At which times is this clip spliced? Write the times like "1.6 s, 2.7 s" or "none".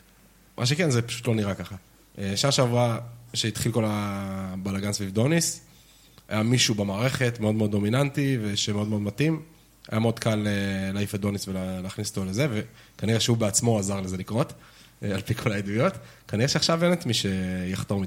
none